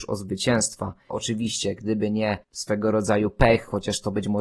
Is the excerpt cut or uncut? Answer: cut